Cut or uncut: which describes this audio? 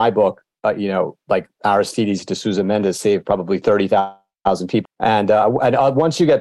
cut